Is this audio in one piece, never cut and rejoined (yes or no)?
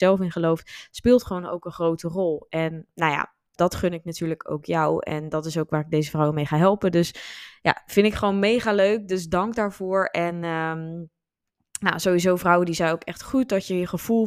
no